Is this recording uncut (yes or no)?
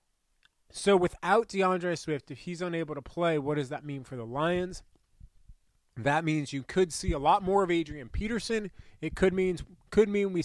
yes